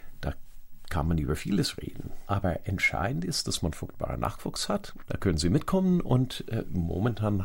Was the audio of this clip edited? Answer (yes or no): yes